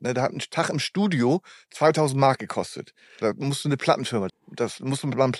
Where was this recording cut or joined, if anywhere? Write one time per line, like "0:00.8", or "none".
0:03.2
0:04.3